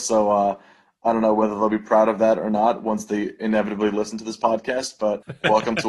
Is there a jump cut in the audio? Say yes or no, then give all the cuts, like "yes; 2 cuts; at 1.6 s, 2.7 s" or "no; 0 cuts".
no; 0 cuts